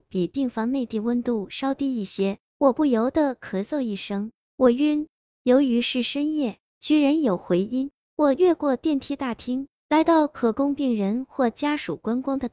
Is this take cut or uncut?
uncut